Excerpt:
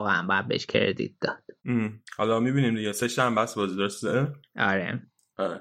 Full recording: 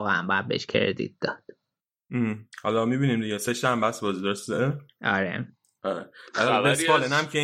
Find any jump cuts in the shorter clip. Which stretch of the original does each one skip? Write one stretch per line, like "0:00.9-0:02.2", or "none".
0:01.6-0:02.0